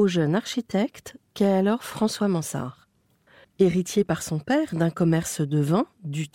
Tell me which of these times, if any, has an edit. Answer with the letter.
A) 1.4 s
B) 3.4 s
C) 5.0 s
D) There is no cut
B